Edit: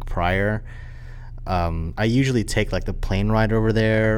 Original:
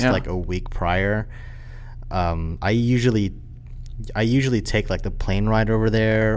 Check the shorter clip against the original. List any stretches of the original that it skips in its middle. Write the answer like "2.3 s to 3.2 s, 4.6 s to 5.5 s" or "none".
2.6 s to 4.1 s